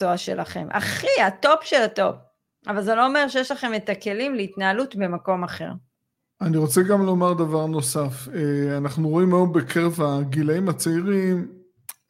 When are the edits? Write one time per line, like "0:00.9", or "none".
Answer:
none